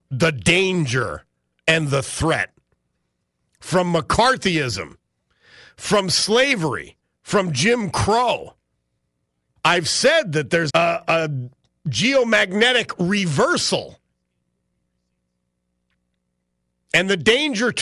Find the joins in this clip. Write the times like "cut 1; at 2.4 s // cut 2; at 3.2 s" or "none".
cut 1; at 9.6 s // cut 2; at 10.7 s